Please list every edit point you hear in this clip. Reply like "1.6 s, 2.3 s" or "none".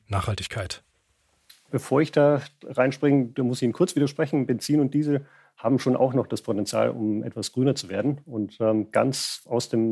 none